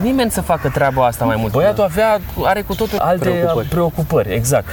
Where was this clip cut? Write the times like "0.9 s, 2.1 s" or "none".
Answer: 1.5 s, 3.0 s